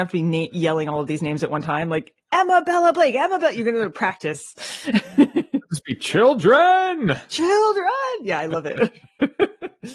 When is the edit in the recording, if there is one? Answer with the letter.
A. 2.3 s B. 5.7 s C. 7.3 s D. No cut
A